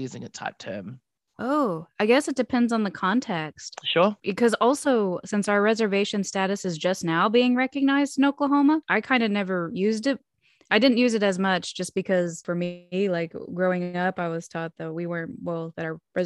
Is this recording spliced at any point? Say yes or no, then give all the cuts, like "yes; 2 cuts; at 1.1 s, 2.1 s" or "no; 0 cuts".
no; 0 cuts